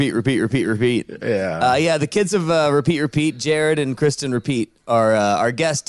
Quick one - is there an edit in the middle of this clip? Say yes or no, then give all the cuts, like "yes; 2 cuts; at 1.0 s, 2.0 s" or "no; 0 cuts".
no; 0 cuts